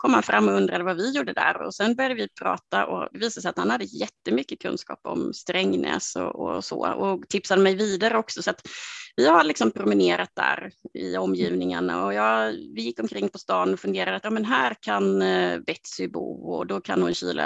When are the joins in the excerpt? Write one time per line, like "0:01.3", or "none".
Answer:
none